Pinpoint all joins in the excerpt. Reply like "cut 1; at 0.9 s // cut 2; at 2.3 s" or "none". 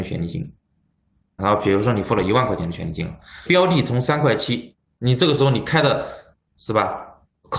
cut 1; at 1.4 s // cut 2; at 3.5 s

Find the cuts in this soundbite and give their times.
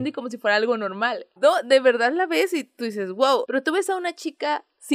cut 1; at 1.4 s // cut 2; at 3.4 s

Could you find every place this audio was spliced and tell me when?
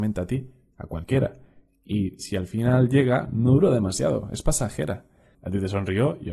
cut 1; at 5.3 s

